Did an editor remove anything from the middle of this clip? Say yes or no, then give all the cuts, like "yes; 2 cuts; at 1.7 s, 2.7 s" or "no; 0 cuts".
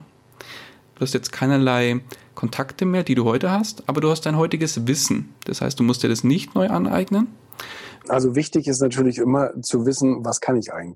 yes; 1 cut; at 8.0 s